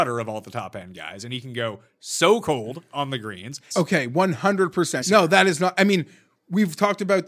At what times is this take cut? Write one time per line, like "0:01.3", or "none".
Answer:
0:03.7
0:05.0

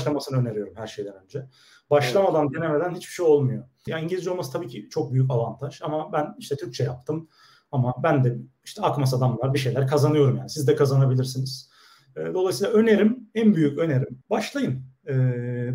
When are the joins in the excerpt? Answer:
0:03.9
0:14.2

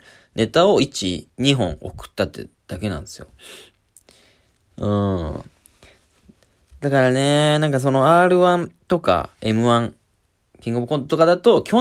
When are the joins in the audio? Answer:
0:04.7

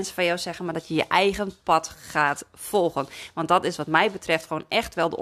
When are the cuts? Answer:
none

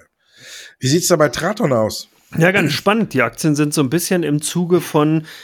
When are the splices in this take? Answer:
none

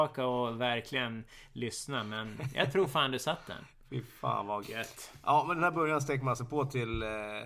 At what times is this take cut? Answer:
0:04.6

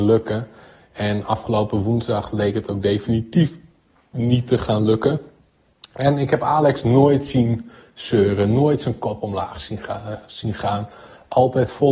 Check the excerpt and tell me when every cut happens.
none

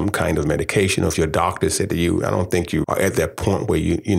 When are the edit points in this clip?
0:02.8

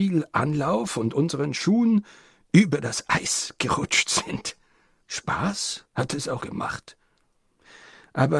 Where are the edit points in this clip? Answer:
0:05.0
0:06.4

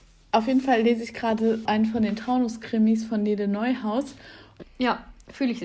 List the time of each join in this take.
0:01.7
0:04.6

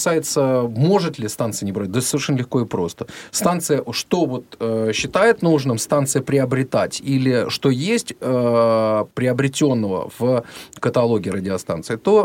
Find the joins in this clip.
0:09.1

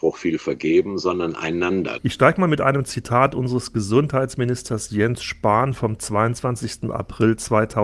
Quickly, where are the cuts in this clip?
0:02.0

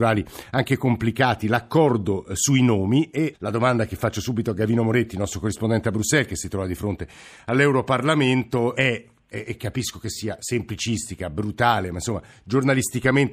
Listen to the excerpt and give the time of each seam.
0:03.3
0:08.7

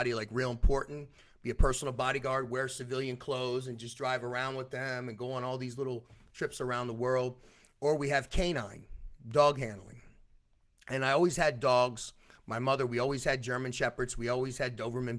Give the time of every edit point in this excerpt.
none

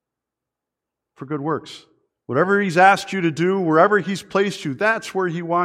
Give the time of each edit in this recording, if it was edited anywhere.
0:02.1

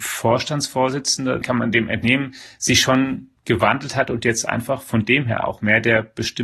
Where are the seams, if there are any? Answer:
0:01.4

